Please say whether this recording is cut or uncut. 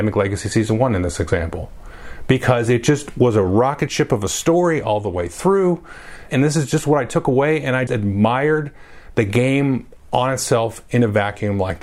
cut